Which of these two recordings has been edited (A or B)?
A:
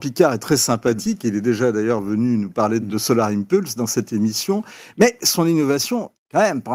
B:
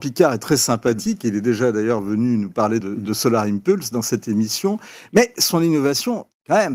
A